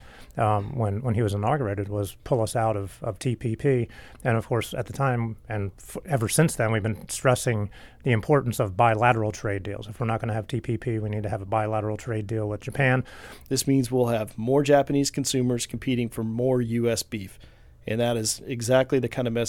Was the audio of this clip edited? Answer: yes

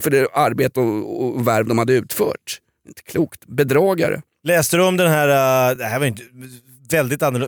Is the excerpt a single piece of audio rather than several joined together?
yes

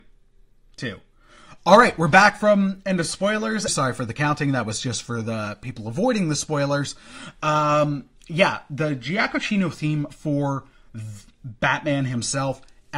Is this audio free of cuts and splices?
no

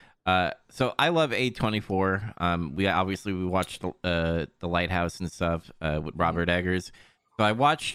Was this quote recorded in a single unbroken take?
yes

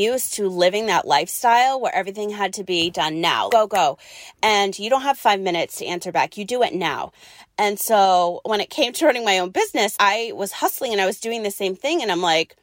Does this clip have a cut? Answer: yes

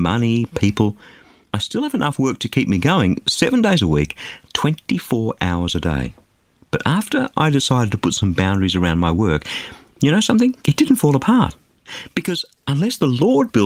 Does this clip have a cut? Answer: yes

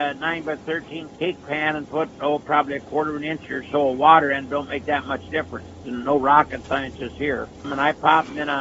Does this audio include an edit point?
yes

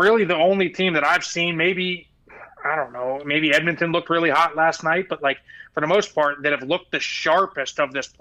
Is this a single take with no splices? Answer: yes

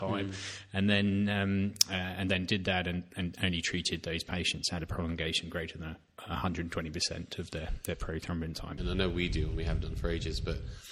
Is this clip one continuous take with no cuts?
no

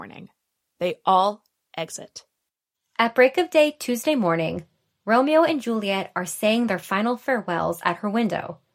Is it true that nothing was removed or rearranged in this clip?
yes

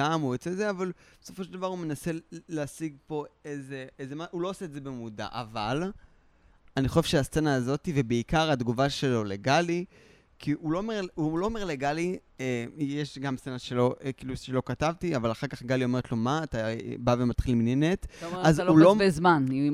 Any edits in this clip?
no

